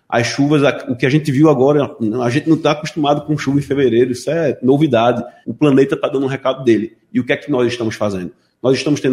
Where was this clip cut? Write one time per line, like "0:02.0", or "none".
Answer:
0:05.4